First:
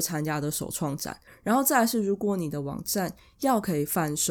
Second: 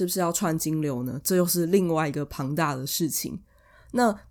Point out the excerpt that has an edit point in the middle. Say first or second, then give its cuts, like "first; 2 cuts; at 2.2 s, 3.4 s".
first; 1 cut; at 1.3 s